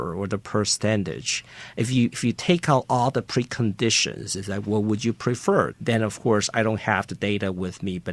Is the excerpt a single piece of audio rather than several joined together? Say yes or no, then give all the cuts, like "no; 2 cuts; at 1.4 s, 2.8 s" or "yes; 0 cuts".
no; 1 cut; at 5.7 s